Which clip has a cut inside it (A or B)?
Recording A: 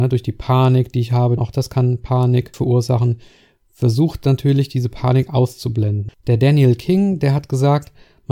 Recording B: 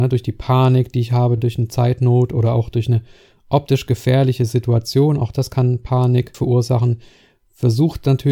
A